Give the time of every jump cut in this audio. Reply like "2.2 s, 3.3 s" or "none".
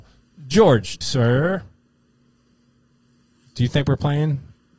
1.0 s